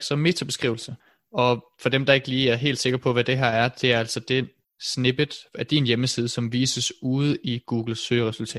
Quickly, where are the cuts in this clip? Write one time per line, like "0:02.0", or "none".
none